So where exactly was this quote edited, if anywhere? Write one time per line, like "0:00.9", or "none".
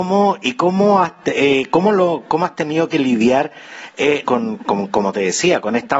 0:04.2